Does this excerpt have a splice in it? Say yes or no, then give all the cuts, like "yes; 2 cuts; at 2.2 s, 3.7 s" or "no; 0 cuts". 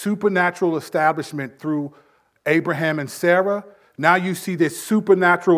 no; 0 cuts